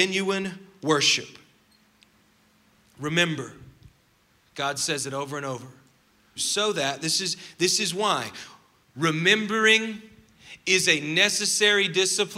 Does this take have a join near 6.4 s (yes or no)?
yes